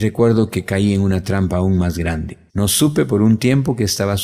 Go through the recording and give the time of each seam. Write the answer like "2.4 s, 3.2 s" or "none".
2.5 s